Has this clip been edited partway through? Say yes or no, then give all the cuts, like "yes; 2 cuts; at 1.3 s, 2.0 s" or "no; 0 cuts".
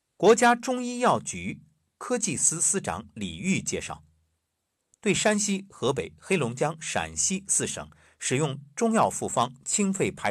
no; 0 cuts